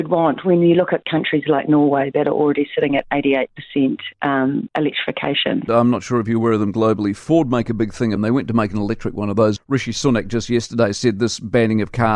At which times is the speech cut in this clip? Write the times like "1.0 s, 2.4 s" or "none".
5.7 s, 8.2 s, 9.6 s